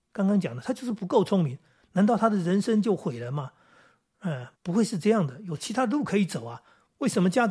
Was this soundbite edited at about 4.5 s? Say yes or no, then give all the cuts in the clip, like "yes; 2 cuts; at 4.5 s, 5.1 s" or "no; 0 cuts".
yes; 1 cut; at 4.5 s